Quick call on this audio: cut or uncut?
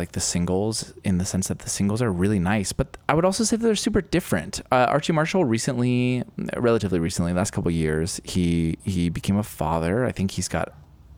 uncut